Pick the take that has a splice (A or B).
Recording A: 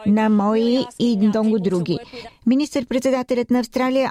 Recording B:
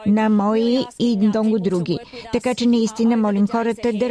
A